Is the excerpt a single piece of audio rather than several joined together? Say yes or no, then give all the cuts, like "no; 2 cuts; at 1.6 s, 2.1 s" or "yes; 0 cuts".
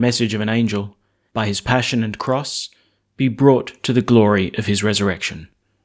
no; 1 cut; at 1.3 s